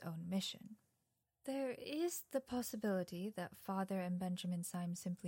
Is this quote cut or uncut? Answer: uncut